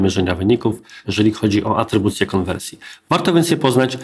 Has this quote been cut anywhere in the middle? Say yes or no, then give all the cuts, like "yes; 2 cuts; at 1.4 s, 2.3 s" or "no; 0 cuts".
yes; 1 cut; at 1.0 s